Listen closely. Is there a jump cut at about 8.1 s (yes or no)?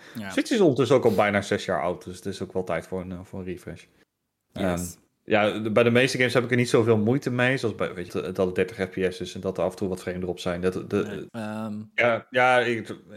yes